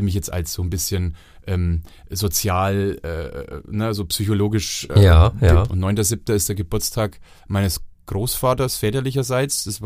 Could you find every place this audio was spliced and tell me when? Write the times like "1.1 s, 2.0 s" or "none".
5.7 s